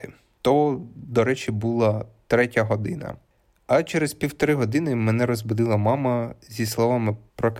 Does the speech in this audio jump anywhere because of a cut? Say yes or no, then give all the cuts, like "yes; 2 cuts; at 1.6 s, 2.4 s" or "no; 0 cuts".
no; 0 cuts